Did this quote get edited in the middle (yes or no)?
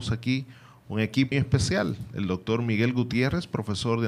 yes